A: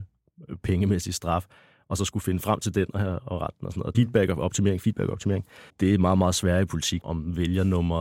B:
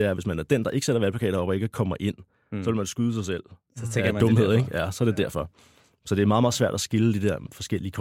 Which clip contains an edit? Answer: A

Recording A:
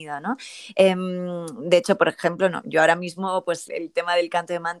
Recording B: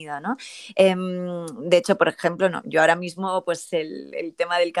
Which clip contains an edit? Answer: A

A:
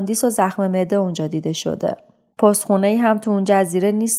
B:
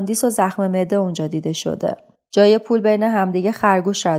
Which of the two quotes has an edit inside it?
B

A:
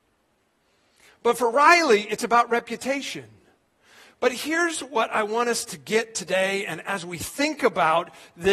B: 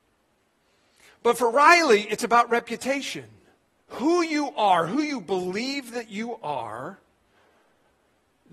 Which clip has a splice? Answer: B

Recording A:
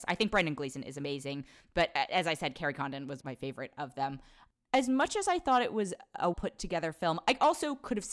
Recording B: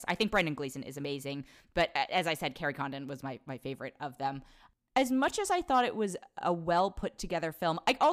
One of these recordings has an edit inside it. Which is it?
A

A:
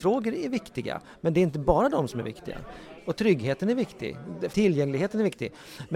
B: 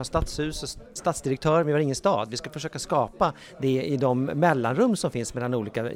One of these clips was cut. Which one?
A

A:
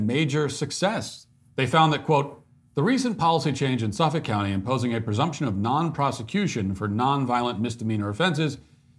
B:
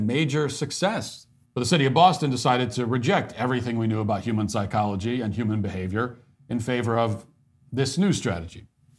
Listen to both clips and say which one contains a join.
B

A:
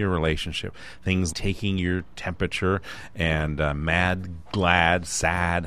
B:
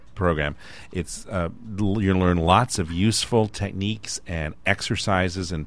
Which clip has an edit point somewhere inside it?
A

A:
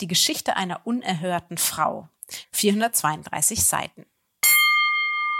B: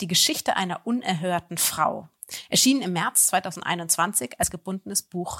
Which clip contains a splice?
A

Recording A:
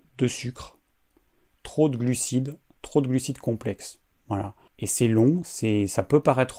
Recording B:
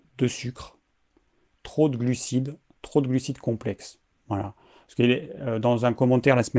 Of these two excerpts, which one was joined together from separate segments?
A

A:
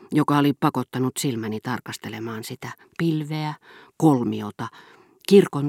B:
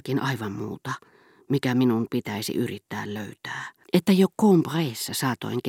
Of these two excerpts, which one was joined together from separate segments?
B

